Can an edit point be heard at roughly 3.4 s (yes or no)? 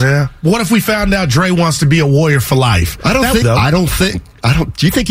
yes